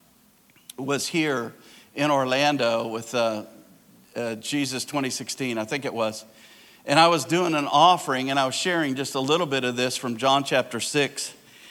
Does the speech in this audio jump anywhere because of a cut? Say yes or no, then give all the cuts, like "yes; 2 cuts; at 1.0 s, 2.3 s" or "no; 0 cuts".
no; 0 cuts